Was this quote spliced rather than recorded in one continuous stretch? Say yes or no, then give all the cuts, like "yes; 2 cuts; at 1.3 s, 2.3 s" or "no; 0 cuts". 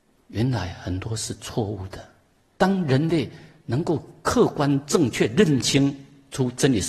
yes; 1 cut; at 2.5 s